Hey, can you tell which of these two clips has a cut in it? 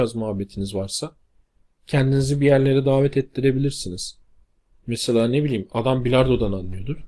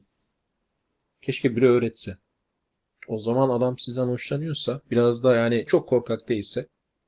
second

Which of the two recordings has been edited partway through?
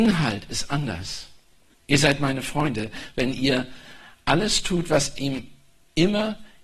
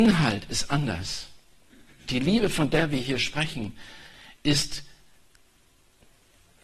first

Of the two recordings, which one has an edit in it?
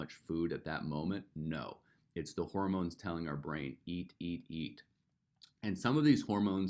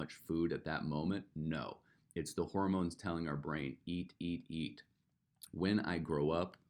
second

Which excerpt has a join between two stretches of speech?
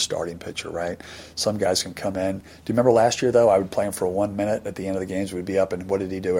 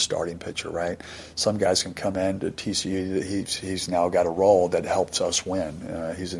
second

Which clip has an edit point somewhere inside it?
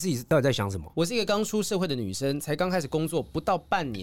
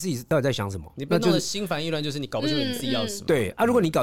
first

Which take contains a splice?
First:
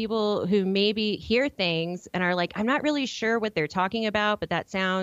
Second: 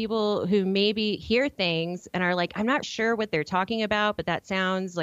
second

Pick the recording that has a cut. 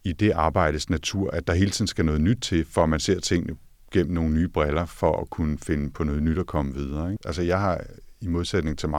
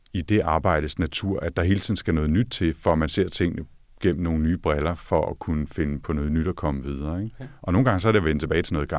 first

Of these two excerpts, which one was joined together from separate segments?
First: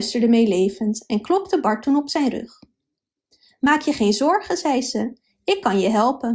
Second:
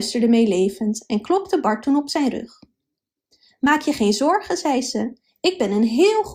second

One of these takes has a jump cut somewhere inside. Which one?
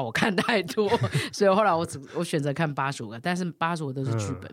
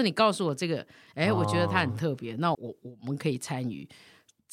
second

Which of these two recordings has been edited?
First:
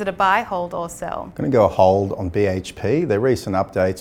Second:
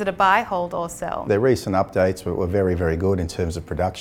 second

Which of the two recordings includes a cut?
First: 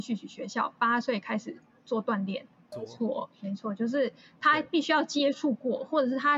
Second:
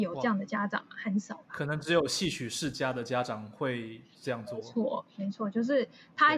first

